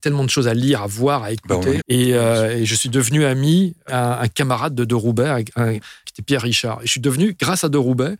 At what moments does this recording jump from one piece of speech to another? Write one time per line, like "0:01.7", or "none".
0:01.8
0:03.9
0:06.0